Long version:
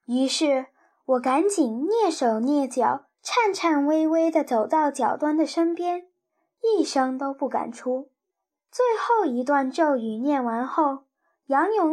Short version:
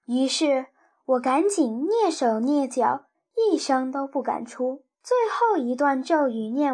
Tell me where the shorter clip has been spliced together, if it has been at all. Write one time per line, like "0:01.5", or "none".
0:03.1
0:04.9